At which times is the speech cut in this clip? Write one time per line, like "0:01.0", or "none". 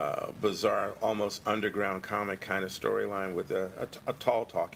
none